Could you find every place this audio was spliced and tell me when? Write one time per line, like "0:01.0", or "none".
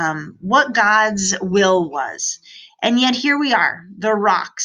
0:02.7